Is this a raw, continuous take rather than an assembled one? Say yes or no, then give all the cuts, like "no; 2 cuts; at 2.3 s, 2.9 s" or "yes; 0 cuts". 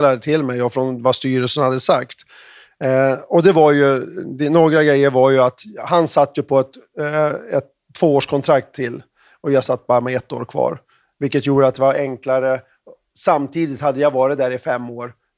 yes; 0 cuts